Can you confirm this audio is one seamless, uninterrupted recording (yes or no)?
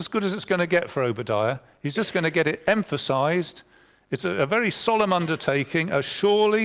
yes